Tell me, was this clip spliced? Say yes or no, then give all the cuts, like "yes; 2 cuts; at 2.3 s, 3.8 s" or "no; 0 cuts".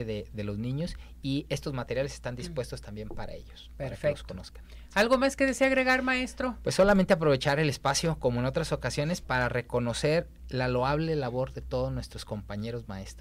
no; 0 cuts